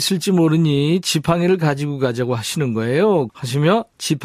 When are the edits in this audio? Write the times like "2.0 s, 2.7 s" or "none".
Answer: 3.3 s